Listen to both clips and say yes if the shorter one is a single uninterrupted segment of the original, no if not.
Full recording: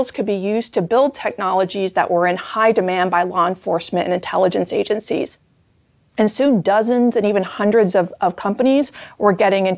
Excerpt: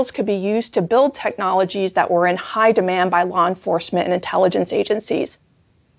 yes